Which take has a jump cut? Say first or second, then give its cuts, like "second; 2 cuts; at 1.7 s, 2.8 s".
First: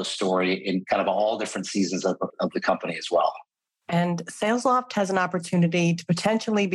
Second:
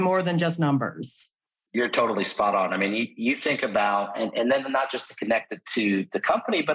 first; 1 cut; at 2.3 s